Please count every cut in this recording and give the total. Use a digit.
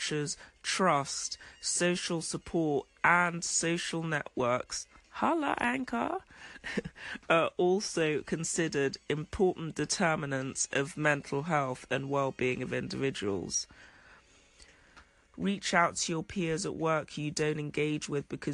1